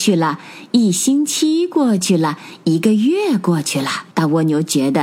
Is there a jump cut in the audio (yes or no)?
yes